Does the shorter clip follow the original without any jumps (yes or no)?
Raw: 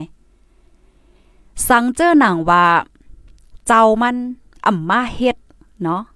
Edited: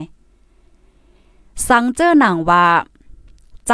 yes